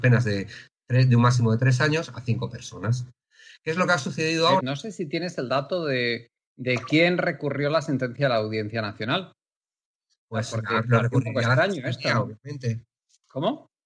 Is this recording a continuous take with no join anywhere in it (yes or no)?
no